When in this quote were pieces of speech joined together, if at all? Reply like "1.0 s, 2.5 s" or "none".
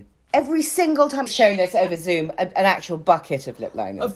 1.3 s